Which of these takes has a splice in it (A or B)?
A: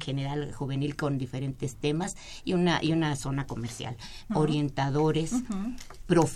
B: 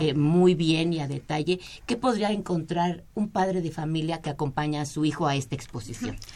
A